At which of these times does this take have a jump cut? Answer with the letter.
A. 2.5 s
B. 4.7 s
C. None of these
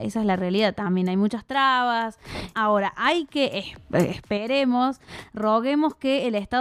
A